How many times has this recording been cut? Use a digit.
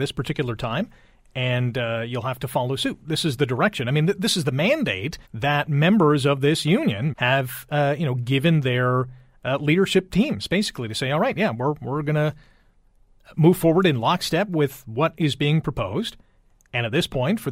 2